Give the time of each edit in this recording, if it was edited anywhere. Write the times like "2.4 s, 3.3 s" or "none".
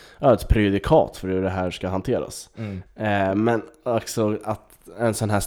2.9 s